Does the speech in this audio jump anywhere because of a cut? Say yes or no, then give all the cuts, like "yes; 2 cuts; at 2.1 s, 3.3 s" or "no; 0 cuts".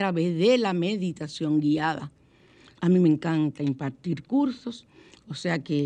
yes; 1 cut; at 2.7 s